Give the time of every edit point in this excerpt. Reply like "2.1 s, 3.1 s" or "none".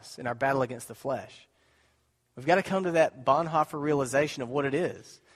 none